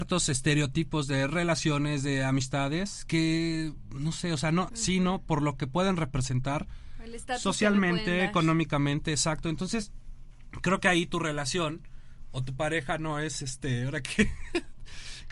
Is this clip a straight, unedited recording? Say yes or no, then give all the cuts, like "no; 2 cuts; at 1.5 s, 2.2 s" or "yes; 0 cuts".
no; 1 cut; at 4.7 s